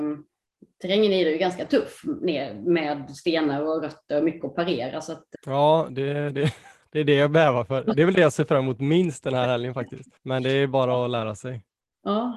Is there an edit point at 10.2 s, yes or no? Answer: yes